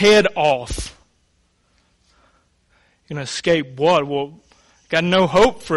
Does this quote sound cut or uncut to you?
uncut